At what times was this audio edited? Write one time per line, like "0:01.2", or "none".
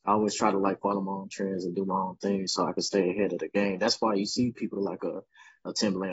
none

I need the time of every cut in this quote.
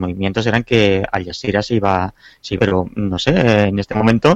0:02.6

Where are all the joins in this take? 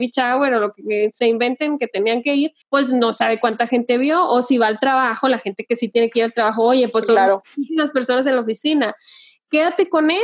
0:02.6

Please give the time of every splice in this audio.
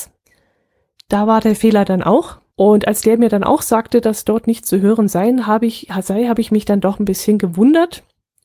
0:02.5

